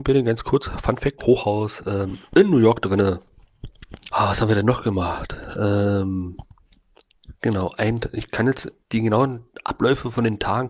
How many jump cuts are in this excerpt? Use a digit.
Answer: 3